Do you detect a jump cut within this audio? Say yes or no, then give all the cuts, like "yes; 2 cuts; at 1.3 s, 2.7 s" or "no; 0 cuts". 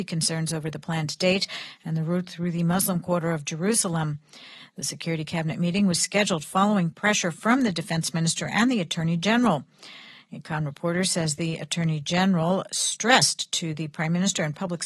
no; 0 cuts